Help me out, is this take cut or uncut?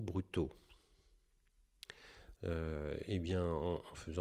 cut